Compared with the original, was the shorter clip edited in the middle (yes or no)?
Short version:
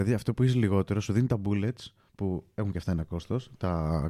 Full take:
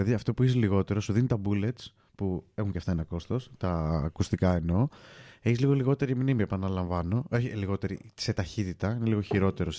no